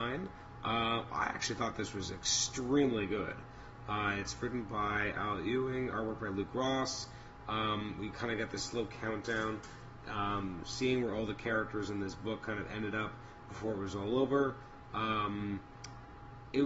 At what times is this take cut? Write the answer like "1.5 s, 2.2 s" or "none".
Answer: none